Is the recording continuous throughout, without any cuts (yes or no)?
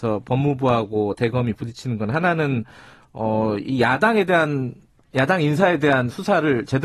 yes